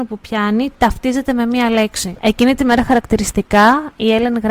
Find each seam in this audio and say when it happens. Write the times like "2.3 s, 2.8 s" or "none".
2.2 s